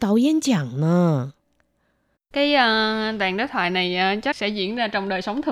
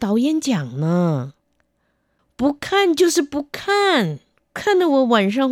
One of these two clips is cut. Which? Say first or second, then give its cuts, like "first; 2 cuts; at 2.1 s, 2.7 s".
first; 1 cut; at 2.2 s